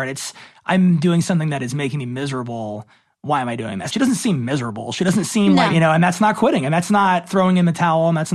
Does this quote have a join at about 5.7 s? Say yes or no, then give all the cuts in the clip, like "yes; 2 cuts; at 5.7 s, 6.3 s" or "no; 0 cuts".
yes; 2 cuts; at 3.9 s, 5.7 s